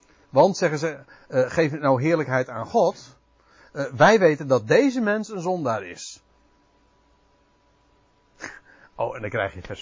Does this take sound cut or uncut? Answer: uncut